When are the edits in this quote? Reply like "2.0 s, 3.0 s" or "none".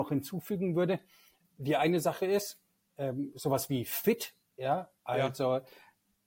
1.4 s